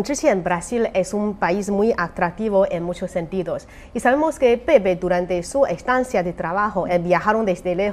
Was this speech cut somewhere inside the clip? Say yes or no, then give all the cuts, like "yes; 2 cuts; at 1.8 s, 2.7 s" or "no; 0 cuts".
yes; 1 cut; at 6.9 s